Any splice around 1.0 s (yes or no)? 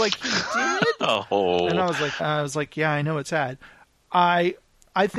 no